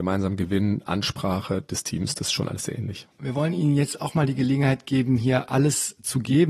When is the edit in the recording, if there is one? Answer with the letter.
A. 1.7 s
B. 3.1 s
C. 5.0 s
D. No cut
D